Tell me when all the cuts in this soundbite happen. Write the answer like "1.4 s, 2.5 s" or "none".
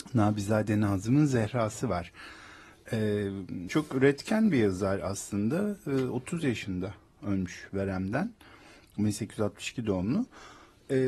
3.7 s